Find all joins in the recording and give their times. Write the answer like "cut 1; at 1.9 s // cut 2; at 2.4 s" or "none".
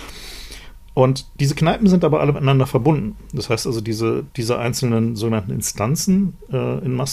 none